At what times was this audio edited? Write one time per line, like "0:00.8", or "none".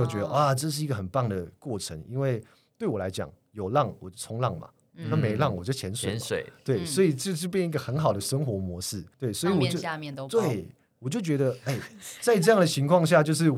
0:09.1